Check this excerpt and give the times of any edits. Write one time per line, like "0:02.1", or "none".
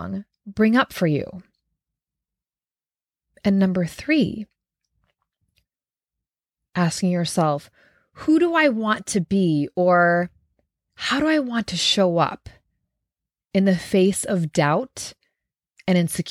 none